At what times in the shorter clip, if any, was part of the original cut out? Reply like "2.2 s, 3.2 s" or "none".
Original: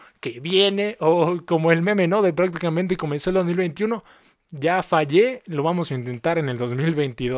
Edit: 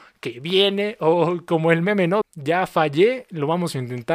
2.2 s